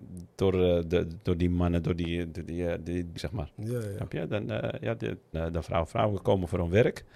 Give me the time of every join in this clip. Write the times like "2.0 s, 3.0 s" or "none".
3.2 s, 5.3 s